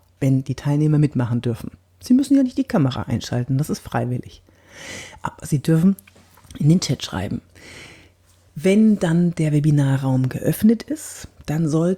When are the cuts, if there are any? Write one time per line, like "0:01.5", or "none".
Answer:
none